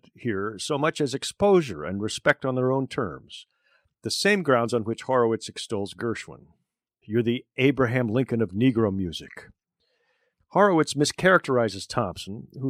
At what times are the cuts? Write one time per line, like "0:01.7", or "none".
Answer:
0:07.0
0:10.3

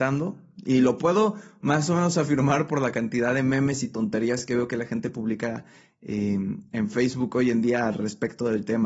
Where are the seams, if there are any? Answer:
none

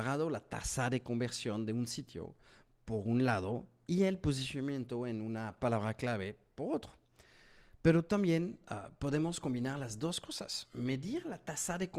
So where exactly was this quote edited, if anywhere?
none

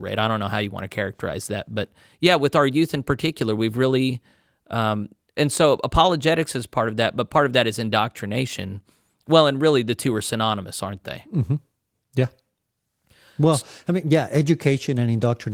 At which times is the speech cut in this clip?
none

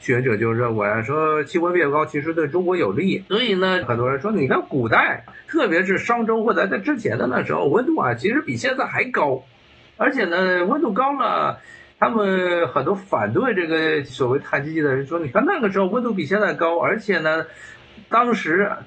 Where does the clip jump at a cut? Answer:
0:03.3

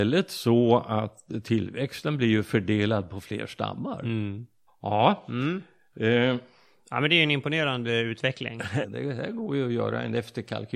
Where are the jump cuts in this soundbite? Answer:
0:04.7
0:08.8

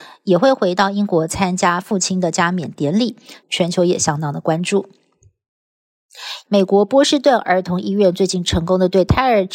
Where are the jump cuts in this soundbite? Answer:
0:03.4
0:06.5

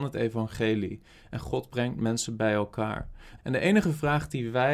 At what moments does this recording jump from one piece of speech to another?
0:03.4

